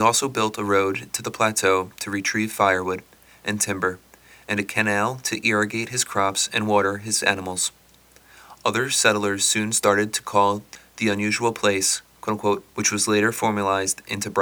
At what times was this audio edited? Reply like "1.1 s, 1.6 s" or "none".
12.7 s